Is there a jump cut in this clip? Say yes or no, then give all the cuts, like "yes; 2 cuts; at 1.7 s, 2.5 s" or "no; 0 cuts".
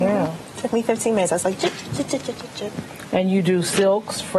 no; 0 cuts